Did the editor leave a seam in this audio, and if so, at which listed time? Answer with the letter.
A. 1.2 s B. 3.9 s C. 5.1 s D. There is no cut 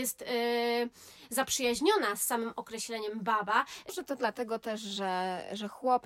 B